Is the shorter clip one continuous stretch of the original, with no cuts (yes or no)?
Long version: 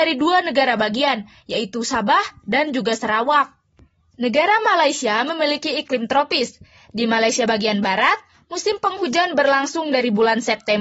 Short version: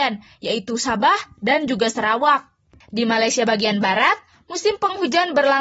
no